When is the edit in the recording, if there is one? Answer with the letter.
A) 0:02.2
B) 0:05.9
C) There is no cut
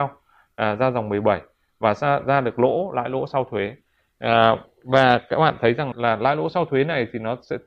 B